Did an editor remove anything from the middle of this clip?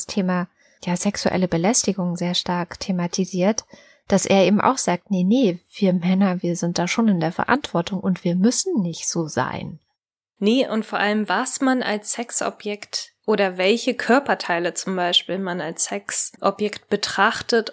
yes; 1 cut; at 10.4 s

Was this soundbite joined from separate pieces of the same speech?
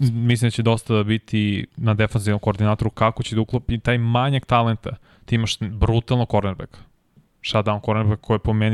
no; 0 cuts

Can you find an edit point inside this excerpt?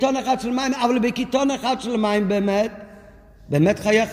no; 0 cuts

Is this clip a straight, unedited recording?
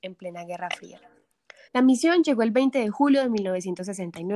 no; 1 cut; at 1.7 s

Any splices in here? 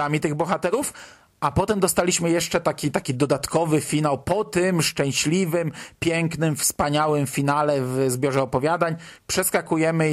no; 0 cuts

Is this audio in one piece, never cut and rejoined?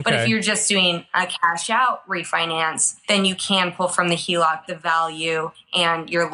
no; 1 cut; at 4.7 s

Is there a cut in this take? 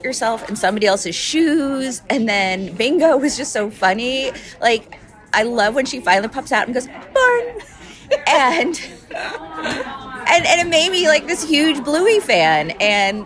no; 0 cuts

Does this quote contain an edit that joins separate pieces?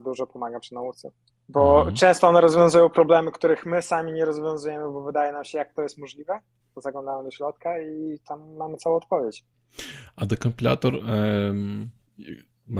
no; 0 cuts

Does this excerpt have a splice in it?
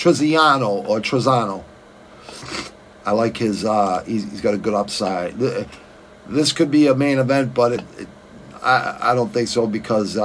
no; 0 cuts

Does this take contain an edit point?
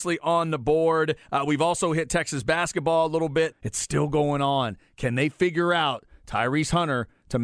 yes; 1 cut; at 3.5 s

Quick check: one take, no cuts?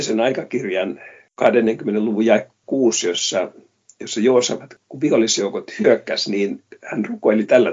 yes; 0 cuts

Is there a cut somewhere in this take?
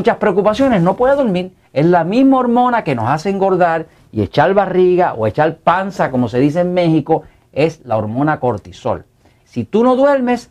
yes; 2 cuts; at 1.6 s, 9.4 s

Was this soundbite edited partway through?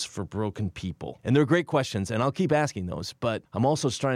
no; 0 cuts

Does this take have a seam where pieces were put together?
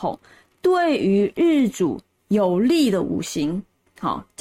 no; 0 cuts

